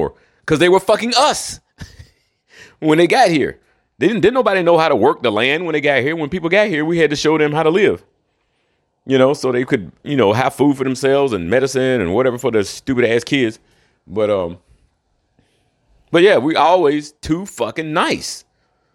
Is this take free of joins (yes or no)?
yes